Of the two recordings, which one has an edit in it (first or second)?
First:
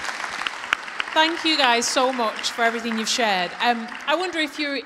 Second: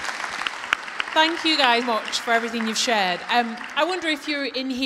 second